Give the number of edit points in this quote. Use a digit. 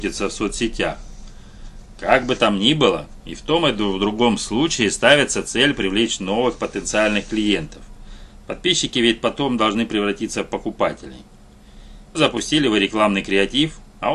1